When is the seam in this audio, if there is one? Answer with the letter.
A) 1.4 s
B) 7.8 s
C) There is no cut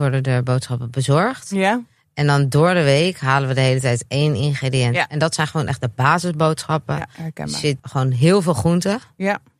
B